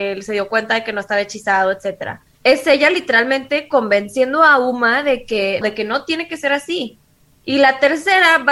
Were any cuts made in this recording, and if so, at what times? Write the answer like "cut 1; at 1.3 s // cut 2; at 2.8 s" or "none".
cut 1; at 2.3 s // cut 2; at 5.6 s